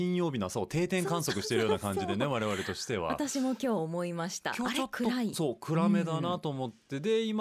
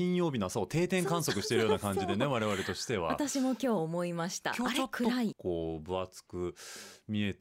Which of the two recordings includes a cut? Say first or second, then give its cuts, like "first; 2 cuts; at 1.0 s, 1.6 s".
second; 1 cut; at 5.3 s